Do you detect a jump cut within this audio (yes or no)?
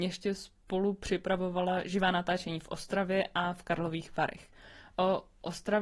no